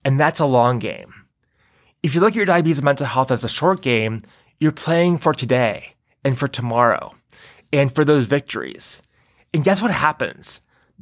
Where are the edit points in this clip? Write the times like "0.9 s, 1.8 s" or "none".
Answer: none